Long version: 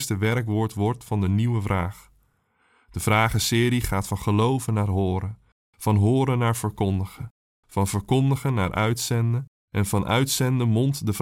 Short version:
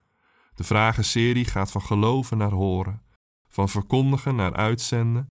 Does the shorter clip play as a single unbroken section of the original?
no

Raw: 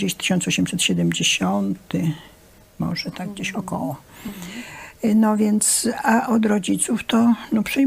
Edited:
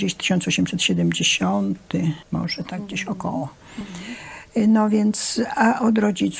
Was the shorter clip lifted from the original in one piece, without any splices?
no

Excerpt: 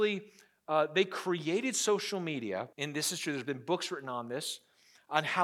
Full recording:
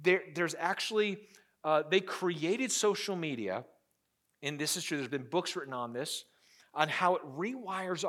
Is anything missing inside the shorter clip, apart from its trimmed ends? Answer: yes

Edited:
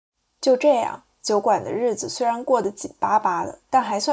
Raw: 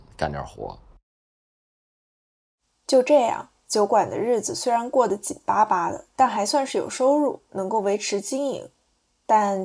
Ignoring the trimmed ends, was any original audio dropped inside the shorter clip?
no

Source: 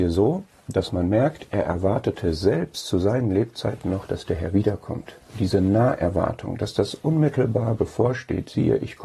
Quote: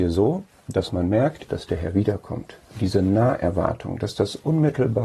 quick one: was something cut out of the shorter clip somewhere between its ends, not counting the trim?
yes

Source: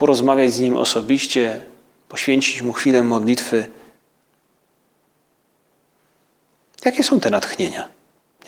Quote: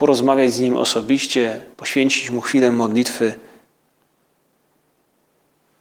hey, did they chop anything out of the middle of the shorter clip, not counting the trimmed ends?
yes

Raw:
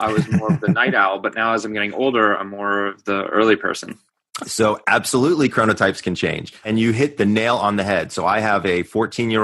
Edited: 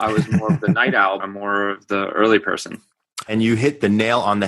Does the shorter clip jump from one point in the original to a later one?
yes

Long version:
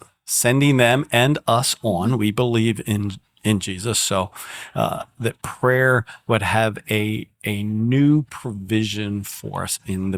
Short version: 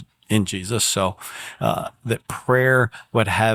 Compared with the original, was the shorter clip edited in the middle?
no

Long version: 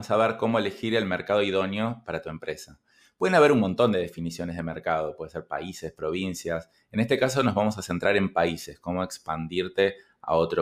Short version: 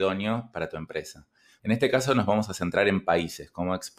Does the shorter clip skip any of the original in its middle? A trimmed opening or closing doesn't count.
yes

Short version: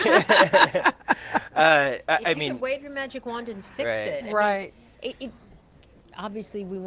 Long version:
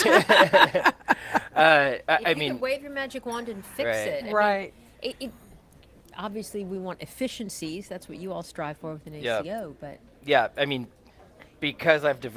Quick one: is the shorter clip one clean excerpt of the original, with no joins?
yes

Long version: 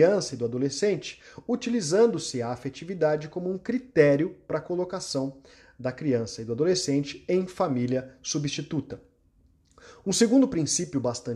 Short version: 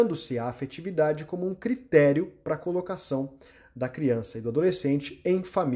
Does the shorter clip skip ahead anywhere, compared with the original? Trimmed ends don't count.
no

